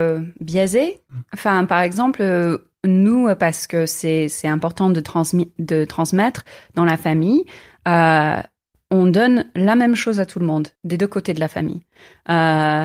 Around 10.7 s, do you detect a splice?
yes; 1 cut; at 10.7 s

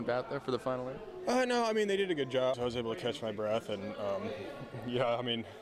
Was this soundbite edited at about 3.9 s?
no; 1 cut; at 2.5 s

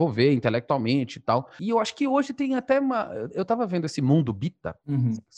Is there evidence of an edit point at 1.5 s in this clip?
no; 0 cuts

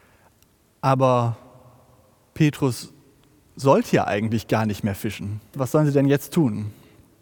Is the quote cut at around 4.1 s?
no; 1 cut; at 5.5 s

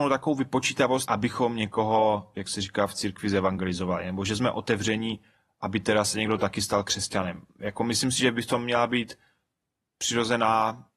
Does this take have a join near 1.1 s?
yes; 1 cut; at 1.1 s

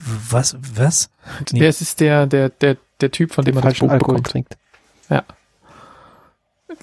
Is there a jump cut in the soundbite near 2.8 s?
no; 1 cut; at 1.5 s

